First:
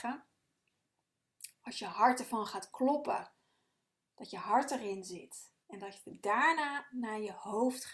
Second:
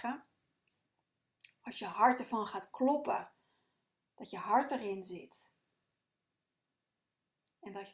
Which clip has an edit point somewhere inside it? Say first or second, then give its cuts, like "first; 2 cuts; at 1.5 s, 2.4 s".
first; 1 cut; at 5.6 s